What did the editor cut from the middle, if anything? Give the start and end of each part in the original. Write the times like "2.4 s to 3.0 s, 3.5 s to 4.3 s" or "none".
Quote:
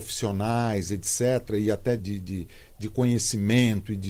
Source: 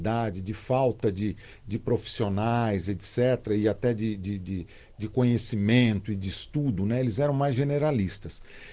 3.9 s to 4.2 s